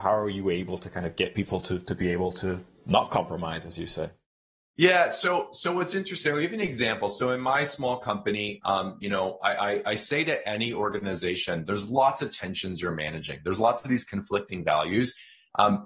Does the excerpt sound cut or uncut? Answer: uncut